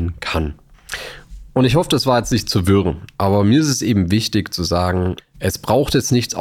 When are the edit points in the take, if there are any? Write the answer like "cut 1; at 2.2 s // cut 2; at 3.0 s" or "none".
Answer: none